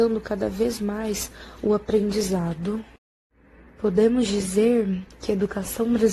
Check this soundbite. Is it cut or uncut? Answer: uncut